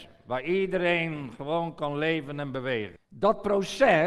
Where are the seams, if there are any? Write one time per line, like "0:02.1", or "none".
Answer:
0:03.0